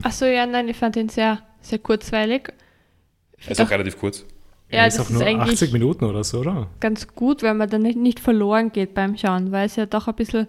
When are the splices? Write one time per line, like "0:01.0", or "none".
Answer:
0:06.8